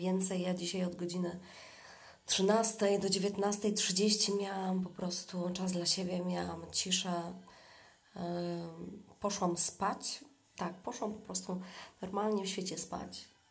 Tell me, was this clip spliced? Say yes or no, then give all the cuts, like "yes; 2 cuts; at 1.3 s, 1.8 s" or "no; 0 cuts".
yes; 1 cut; at 10.5 s